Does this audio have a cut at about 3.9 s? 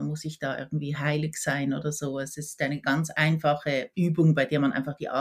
yes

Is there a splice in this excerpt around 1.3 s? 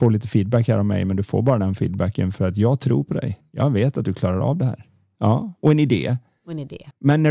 no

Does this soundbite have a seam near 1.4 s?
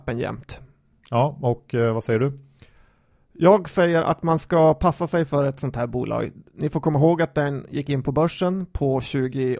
no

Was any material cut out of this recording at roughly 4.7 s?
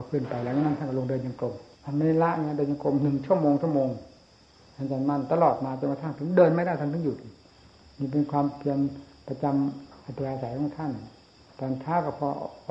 no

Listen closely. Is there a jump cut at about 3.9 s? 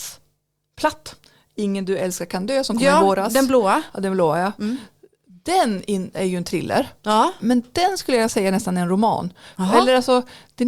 no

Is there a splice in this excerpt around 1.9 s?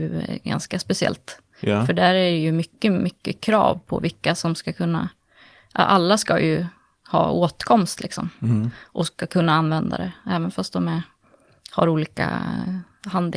no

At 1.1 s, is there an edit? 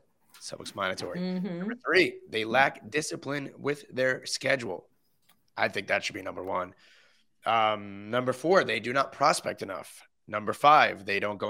no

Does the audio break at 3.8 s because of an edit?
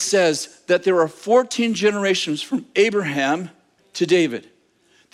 yes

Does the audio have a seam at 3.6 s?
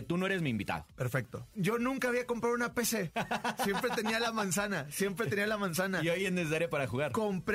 no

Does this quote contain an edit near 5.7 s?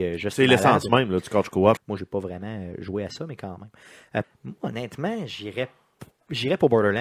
no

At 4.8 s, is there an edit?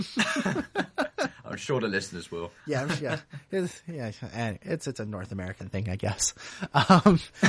yes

